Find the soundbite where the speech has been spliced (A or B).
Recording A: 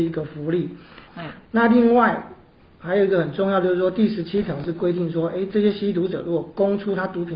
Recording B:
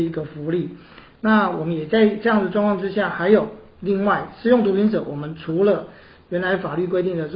A